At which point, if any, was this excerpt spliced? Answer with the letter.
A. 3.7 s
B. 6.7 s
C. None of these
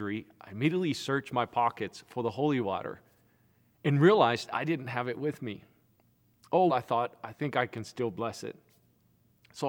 B